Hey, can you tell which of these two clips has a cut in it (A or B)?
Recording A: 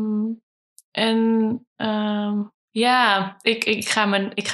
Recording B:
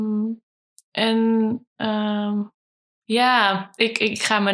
A